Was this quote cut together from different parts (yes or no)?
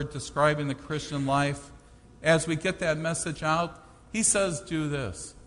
no